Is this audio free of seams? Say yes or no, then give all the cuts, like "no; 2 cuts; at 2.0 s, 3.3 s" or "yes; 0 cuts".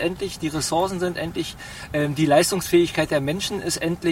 yes; 0 cuts